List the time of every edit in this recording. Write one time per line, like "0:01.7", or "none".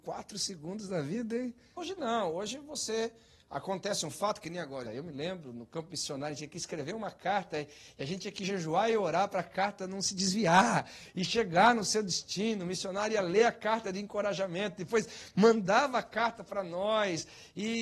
0:01.8
0:04.9